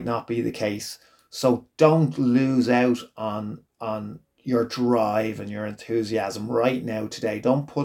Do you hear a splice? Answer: no; 0 cuts

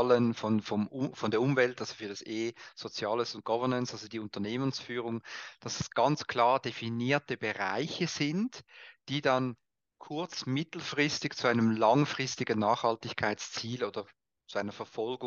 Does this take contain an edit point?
no; 0 cuts

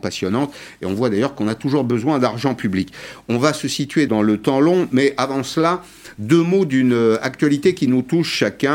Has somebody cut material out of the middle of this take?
yes; 1 cut; at 4.1 s

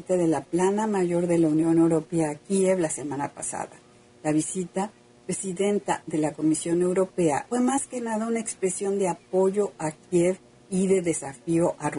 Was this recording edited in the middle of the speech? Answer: yes; 2 cuts; at 5.1 s, 7.5 s

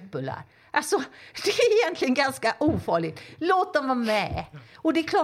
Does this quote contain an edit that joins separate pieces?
no; 0 cuts

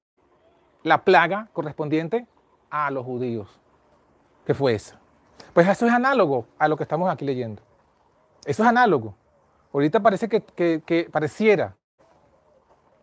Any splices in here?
no; 0 cuts

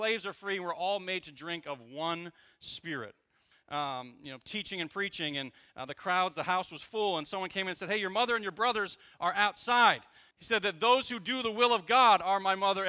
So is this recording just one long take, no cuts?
no; 2 cuts; at 3.5 s, 10.3 s

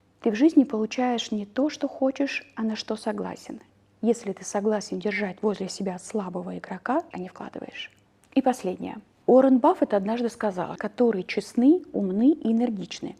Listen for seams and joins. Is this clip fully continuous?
no; 3 cuts; at 7.1 s, 9.2 s, 10.8 s

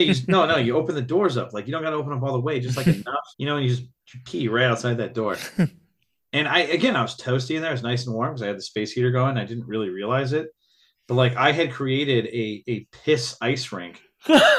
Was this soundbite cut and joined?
yes; 1 cut; at 3.3 s

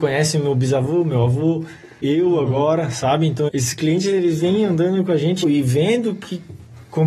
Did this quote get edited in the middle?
yes; 3 cuts; at 2.0 s, 3.5 s, 5.4 s

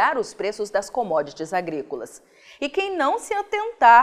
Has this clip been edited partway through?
no; 0 cuts

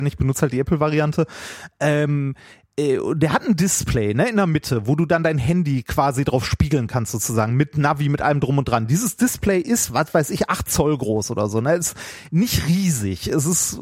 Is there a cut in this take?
no; 0 cuts

